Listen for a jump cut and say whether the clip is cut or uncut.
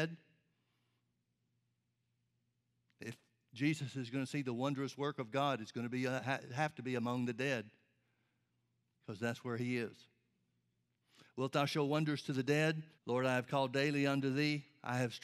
cut